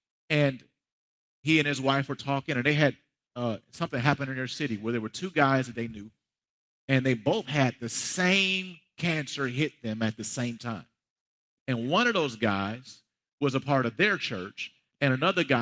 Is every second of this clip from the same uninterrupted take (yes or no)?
yes